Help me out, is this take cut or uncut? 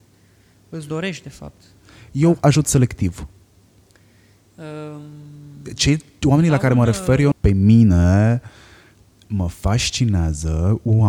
cut